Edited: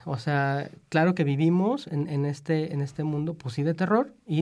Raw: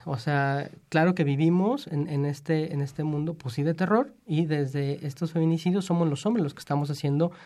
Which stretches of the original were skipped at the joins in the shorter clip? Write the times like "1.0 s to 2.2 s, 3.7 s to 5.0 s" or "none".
none

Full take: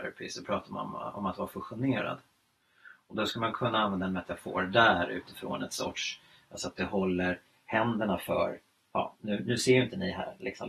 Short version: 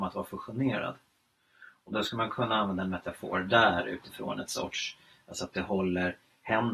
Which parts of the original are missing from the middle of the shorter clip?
none

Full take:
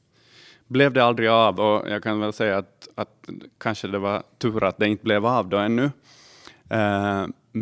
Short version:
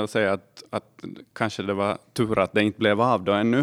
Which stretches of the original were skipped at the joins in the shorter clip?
none

